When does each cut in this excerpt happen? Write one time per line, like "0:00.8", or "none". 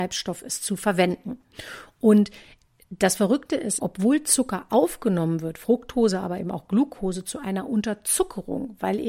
0:03.8